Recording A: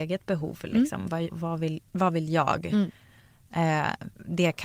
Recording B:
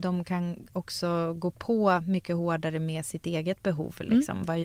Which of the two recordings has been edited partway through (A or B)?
A